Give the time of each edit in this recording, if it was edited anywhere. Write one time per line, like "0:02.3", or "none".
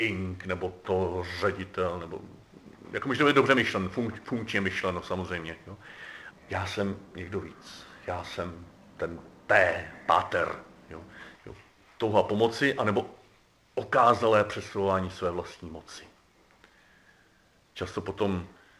0:06.3
0:11.3